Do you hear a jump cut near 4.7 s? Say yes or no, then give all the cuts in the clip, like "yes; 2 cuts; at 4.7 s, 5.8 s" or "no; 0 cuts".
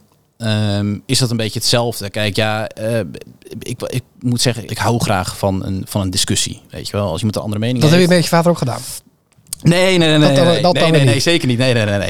yes; 1 cut; at 4.7 s